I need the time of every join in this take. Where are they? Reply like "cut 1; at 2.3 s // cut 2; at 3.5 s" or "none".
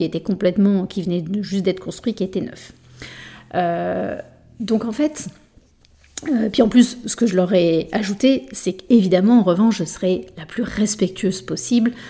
none